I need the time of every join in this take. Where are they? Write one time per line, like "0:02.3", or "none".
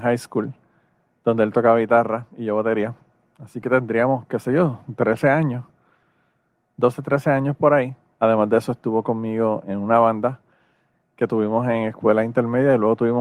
0:03.3
0:08.1
0:09.6

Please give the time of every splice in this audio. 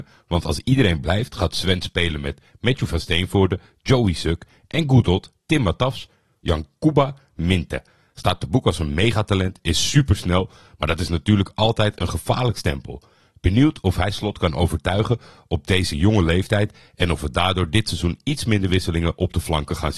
0:06.4

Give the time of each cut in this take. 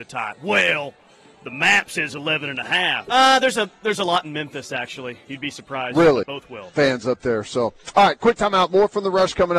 0:03.1
0:06.2

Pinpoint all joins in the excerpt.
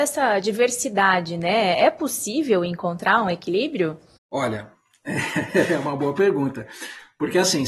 none

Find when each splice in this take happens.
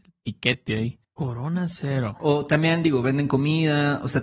0:01.0
0:02.2

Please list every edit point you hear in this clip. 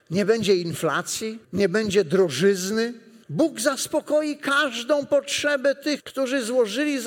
0:01.4
0:03.2
0:06.0

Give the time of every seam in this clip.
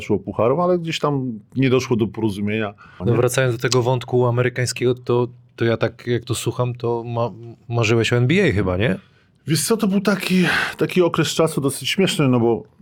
0:03.0

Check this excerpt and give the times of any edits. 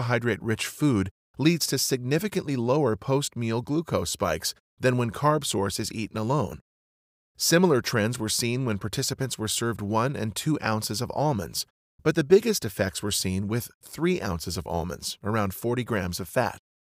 none

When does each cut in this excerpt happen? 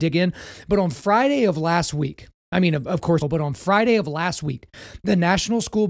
0:03.2

